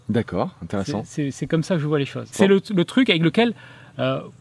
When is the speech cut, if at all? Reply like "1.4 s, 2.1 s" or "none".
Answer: 2.3 s

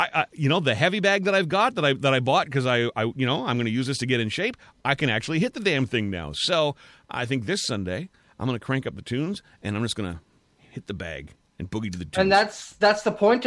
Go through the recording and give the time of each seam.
none

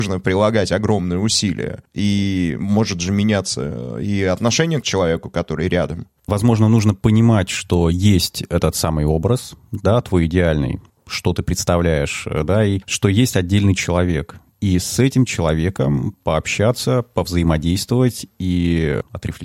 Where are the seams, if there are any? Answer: none

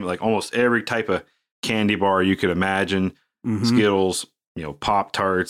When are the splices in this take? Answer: none

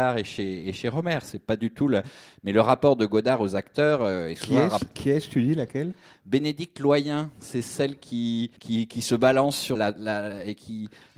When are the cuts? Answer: 8.6 s, 9.7 s

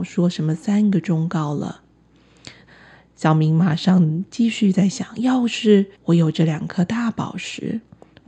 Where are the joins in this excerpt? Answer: 2.7 s, 6.0 s

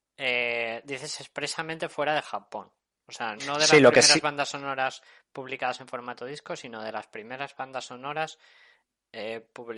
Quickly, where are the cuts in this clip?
3.4 s

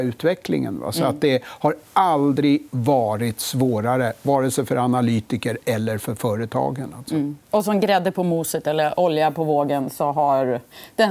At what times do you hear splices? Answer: 7.4 s

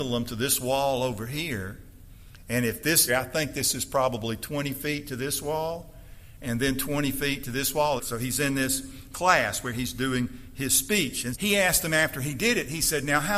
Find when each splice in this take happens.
3.1 s, 8.0 s, 11.3 s

